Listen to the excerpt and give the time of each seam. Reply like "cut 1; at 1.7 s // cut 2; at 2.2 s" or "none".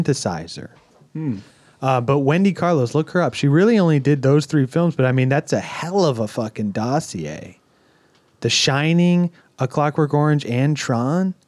none